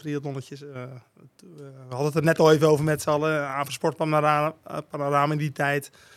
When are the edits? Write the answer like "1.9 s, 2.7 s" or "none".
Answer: none